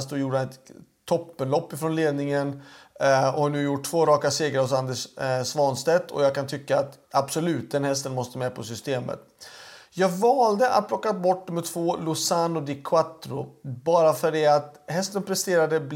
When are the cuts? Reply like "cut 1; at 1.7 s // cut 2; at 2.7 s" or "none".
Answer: cut 1; at 7.0 s